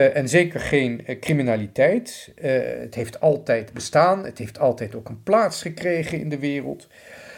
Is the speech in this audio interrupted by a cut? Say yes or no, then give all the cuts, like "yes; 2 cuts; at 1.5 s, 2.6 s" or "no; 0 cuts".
no; 0 cuts